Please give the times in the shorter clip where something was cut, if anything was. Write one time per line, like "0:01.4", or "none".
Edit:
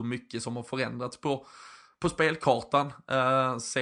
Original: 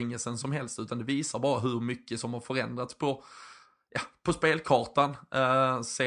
0:01.9